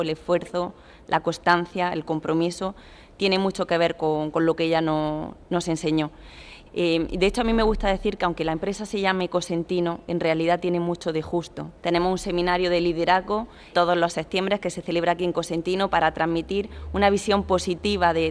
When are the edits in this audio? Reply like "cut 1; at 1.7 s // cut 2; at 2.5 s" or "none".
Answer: cut 1; at 6.7 s // cut 2; at 11.8 s // cut 3; at 13.7 s